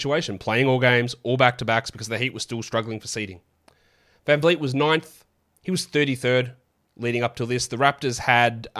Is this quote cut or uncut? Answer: uncut